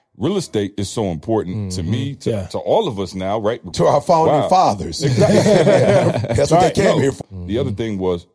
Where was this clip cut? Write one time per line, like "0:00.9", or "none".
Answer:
0:03.7
0:07.2